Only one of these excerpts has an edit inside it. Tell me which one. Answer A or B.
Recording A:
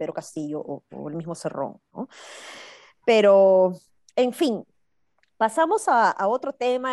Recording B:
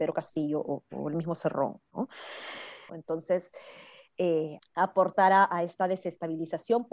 B